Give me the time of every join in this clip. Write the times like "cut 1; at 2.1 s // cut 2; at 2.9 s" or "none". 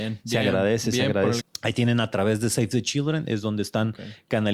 cut 1; at 1.4 s